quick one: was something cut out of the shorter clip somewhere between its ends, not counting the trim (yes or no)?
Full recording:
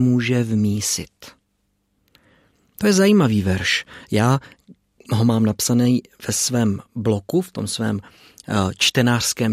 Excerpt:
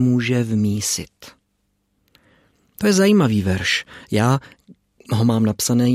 no